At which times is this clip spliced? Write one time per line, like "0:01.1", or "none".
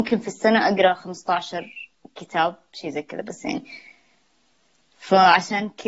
none